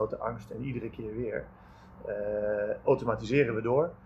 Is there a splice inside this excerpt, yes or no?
no